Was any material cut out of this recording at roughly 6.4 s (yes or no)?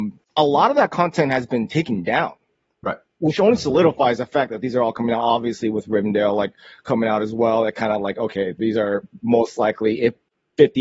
no